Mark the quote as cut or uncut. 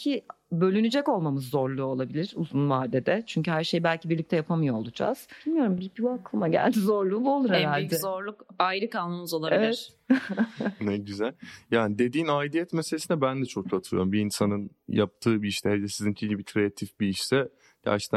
uncut